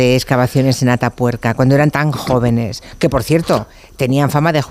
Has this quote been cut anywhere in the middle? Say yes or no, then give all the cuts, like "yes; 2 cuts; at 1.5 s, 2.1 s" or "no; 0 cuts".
no; 0 cuts